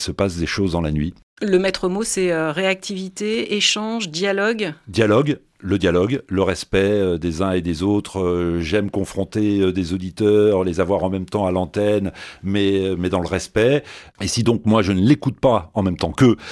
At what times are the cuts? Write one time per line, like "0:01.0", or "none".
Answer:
0:14.1